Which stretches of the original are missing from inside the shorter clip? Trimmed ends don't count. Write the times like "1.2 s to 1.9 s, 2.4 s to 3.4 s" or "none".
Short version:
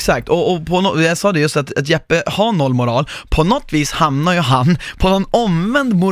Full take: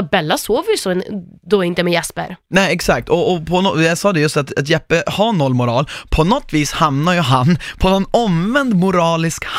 none